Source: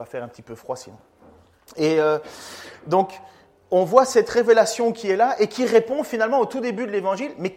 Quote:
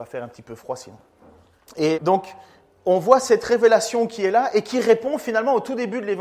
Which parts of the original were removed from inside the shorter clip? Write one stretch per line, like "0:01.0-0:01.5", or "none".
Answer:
0:01.9-0:02.8

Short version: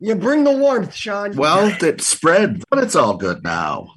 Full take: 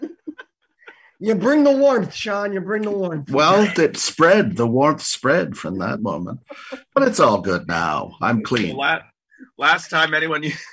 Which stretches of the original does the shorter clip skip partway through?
0:02.5-0:03.3
0:04.6-0:06.8

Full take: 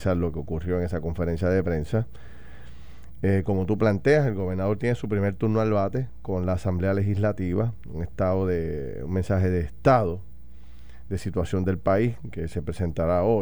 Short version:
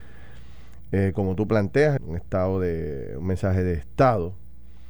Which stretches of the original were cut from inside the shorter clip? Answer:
0:04.3-0:07.8

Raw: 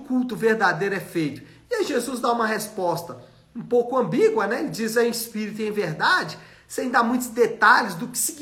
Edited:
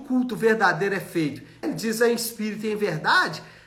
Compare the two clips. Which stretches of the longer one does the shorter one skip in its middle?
0:01.6-0:04.6

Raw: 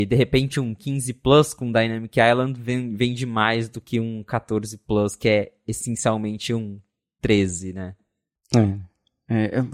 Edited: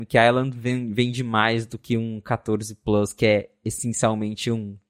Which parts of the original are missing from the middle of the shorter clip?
none

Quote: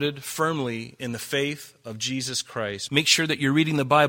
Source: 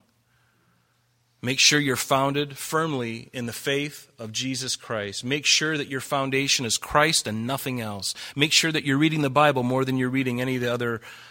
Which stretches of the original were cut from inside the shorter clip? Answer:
0:05.2-0:08.3

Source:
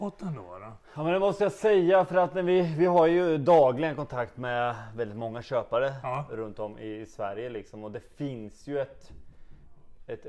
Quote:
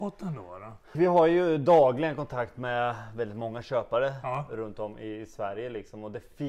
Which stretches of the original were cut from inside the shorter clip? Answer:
0:00.9-0:02.7

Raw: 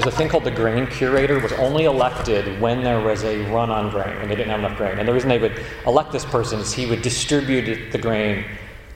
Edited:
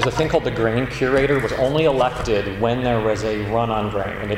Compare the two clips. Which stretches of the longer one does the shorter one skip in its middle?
none

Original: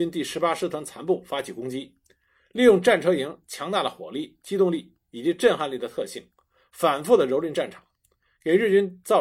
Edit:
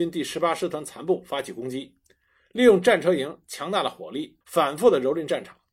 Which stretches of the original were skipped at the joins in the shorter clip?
0:04.4-0:06.7

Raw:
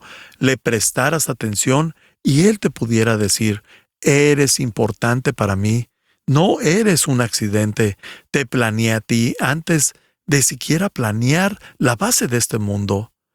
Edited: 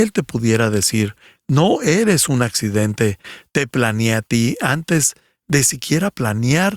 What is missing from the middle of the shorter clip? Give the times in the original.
0:03.8-0:06.1

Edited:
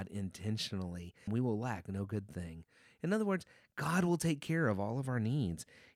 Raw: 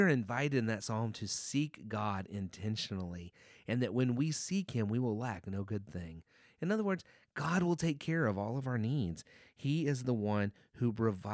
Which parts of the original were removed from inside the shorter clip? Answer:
0:03.5-0:04.9

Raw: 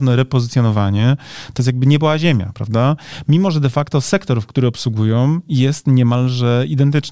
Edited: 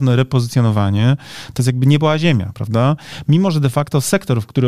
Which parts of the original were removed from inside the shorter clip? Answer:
none

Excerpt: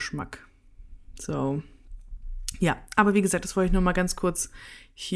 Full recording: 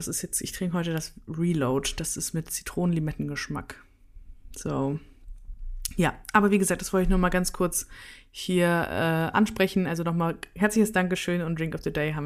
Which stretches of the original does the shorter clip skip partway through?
none

